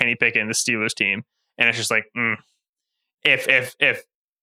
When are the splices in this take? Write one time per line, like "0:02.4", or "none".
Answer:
none